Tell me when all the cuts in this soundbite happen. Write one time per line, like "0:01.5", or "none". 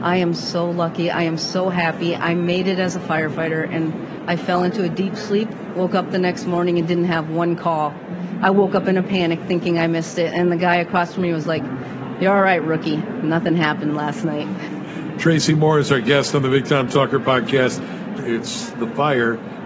0:18.2